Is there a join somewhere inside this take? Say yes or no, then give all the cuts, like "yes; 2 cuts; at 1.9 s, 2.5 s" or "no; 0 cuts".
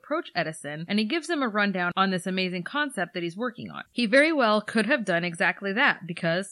yes; 1 cut; at 3.9 s